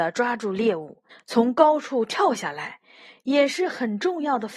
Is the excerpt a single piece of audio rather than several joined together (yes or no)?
no